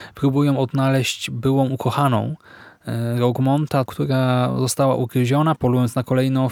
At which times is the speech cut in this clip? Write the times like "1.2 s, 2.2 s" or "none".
3.9 s, 5.6 s